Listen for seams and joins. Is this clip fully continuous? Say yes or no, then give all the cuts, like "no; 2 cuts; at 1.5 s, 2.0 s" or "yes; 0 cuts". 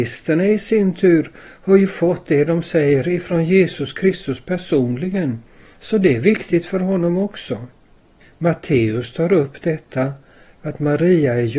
yes; 0 cuts